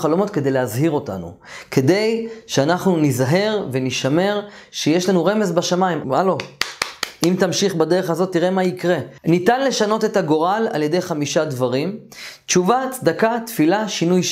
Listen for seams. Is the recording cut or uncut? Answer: cut